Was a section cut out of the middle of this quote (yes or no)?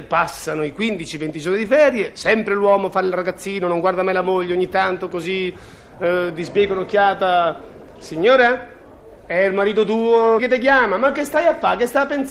yes